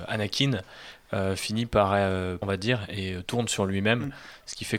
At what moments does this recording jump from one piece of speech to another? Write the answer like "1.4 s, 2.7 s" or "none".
2.4 s